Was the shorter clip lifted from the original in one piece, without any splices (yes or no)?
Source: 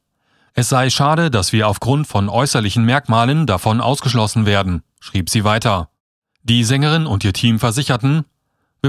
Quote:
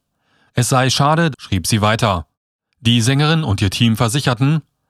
no